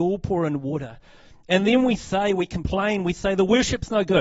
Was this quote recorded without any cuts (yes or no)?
yes